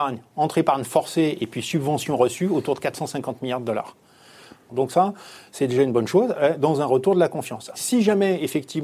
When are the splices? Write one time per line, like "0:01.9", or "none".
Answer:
0:04.7
0:07.7